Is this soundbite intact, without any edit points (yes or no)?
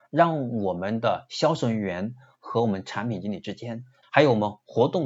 no